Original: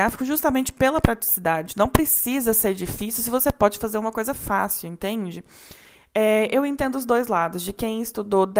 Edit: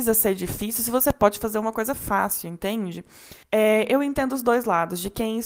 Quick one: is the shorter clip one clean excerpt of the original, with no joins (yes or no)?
no